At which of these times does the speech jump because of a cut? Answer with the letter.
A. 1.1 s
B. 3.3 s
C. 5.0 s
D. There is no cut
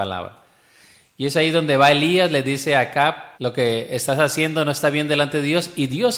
B